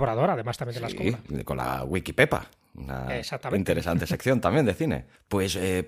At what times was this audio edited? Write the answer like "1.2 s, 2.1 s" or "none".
none